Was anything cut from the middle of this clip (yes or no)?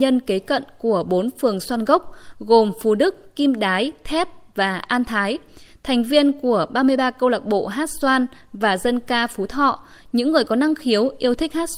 no